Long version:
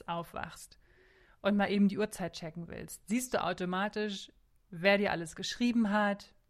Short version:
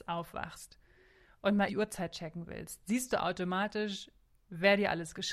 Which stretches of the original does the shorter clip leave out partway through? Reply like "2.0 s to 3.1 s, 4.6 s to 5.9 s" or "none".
1.7 s to 1.9 s

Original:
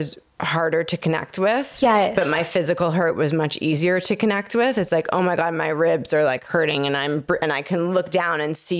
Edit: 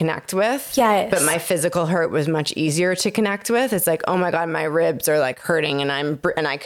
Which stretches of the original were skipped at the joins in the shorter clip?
none

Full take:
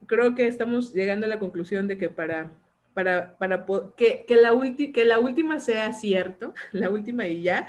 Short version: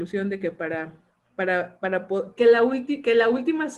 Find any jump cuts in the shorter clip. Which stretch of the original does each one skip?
3.9 s to 4.3 s

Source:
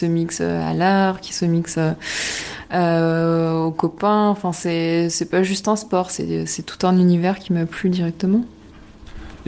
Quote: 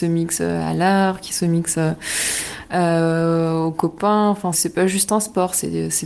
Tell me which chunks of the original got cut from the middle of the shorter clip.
4.5 s to 5.1 s

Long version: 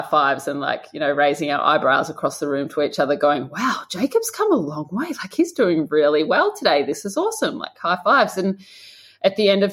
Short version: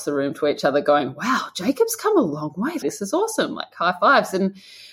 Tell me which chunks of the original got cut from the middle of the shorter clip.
5.2 s to 6.9 s

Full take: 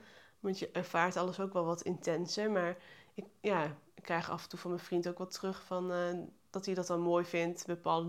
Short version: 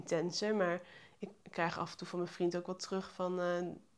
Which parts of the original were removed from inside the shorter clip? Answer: 3.4 s to 3.9 s

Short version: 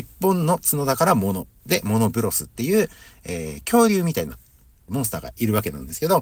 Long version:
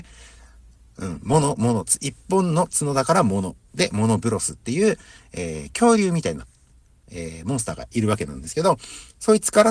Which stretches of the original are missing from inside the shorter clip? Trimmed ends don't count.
7.0 s to 7.4 s

